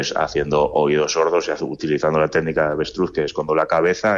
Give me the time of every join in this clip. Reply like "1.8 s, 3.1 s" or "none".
none